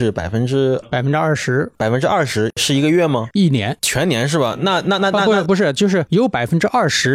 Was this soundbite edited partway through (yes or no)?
no